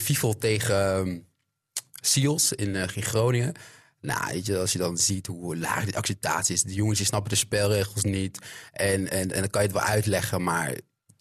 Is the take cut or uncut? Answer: uncut